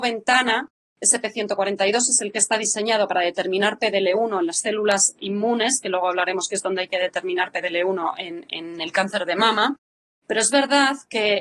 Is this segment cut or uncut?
cut